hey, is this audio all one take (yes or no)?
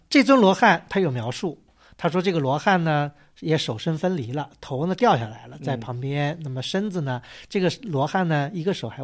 yes